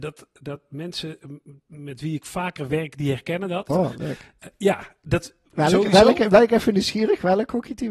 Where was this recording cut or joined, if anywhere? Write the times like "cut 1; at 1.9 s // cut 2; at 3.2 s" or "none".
cut 1; at 3.7 s